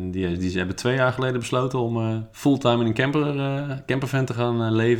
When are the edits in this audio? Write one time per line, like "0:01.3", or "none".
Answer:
0:02.3